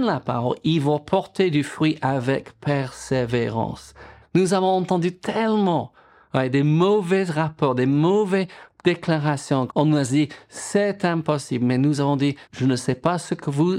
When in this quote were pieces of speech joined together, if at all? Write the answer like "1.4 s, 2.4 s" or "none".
4.2 s, 9.7 s, 12.4 s